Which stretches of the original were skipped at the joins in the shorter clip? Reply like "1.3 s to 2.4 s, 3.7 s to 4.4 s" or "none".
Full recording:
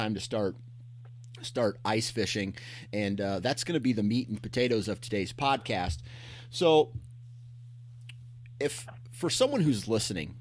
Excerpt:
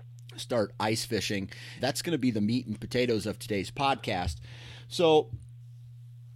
2.9 s to 3.4 s